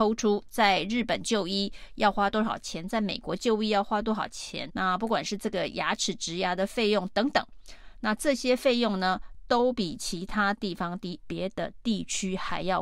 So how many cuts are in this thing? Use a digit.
2